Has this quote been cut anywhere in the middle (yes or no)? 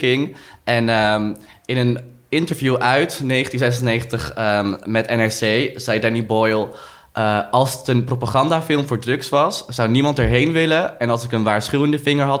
no